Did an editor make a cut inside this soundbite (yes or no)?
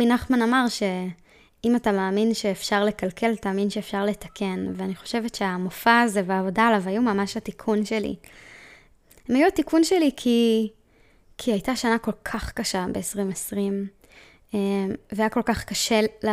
no